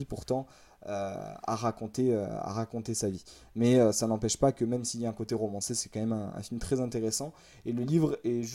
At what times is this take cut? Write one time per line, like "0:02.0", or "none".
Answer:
none